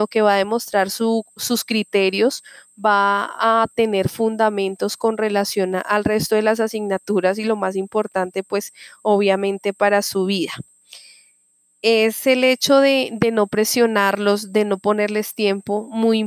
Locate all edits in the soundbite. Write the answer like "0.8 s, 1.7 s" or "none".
none